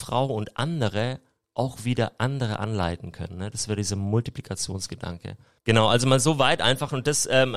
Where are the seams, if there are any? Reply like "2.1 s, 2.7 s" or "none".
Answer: 5.6 s